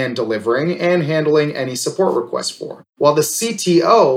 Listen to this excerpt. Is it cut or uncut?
uncut